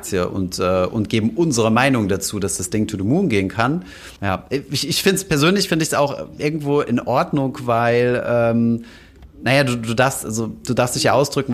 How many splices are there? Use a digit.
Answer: 1